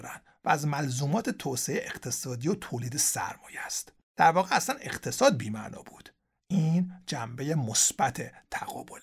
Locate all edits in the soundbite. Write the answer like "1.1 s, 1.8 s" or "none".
4.0 s